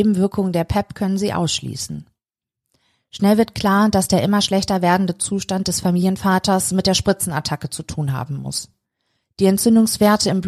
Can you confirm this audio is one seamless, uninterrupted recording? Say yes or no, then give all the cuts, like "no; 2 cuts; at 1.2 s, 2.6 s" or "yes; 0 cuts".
yes; 0 cuts